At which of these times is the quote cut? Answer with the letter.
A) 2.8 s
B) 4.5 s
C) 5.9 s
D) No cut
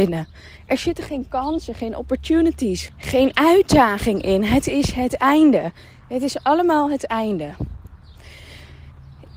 A